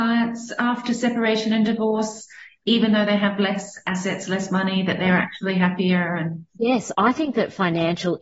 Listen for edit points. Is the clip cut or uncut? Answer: uncut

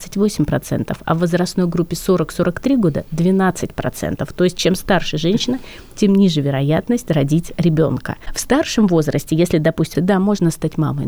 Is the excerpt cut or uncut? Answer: cut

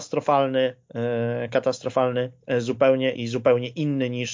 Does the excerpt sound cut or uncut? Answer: cut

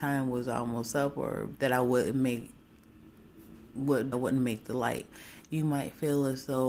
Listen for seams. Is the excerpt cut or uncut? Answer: cut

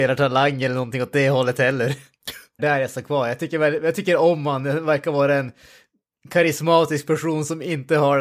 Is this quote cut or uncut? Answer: cut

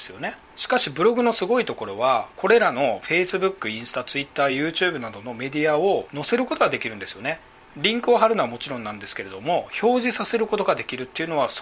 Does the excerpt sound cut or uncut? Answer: uncut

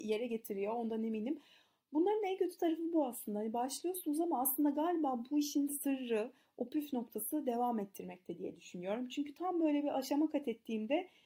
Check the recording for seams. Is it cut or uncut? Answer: uncut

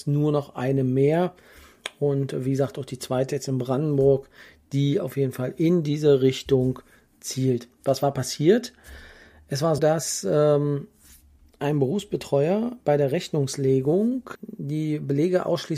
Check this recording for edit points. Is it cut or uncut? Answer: cut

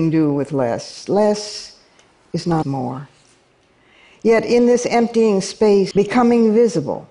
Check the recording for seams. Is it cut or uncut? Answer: cut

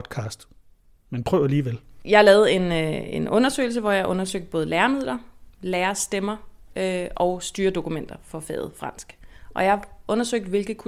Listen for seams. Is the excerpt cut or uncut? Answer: uncut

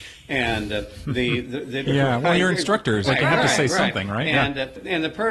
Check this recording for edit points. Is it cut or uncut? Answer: cut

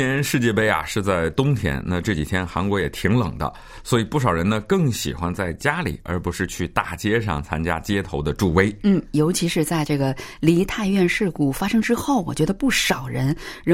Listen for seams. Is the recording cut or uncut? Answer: uncut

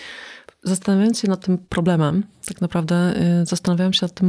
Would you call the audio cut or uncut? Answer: cut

